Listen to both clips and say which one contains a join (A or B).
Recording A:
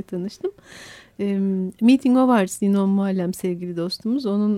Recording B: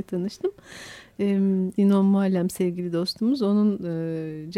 B